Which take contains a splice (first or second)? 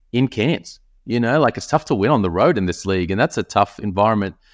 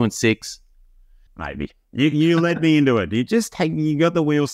second